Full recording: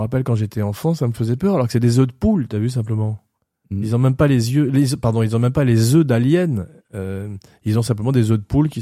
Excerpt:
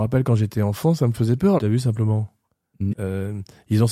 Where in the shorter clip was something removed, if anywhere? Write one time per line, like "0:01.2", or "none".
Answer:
0:01.6
0:02.9